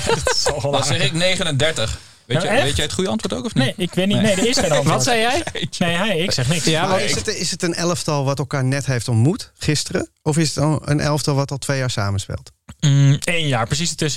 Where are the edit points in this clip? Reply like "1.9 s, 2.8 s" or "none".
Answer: none